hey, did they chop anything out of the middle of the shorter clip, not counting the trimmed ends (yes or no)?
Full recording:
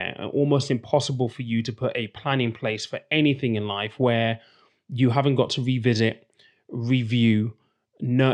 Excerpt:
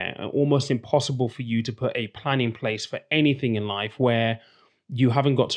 no